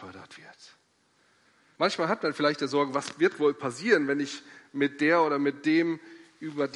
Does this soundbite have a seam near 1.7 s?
yes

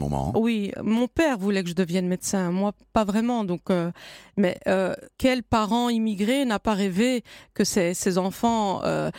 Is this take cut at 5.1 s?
yes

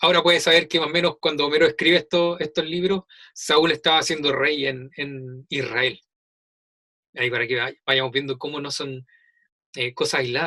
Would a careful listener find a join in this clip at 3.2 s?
no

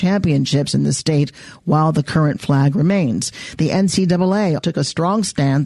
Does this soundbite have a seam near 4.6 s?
yes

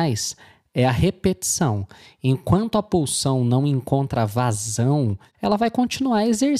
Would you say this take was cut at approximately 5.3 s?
yes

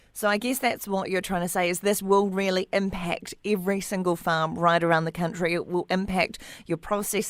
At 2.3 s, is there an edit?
no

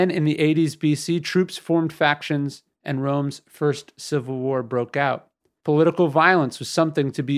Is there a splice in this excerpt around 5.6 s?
yes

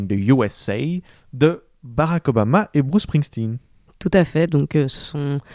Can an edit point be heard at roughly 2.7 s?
no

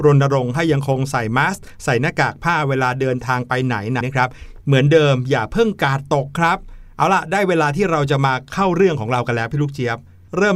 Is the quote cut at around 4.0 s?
yes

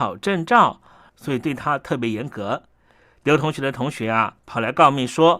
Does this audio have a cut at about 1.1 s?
yes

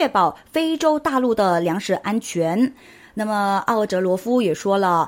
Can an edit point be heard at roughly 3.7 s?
no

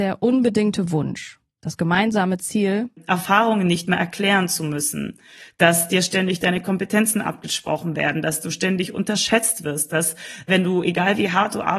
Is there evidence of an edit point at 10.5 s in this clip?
yes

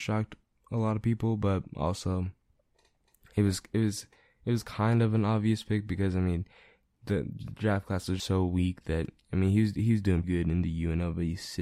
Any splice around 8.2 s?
yes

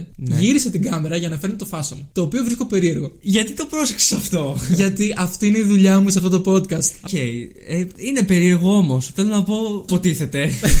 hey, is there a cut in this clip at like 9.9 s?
yes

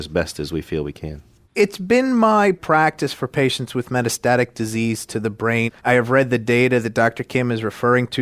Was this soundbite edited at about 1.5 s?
yes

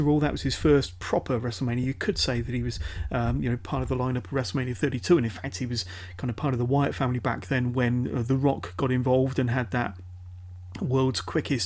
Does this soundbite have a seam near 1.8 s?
no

